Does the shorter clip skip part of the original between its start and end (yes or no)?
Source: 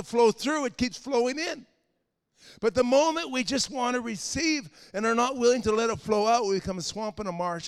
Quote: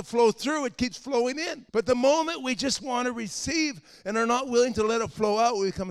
yes